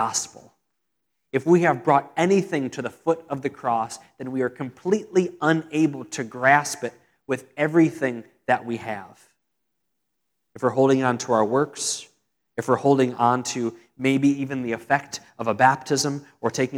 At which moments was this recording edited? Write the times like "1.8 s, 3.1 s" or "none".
none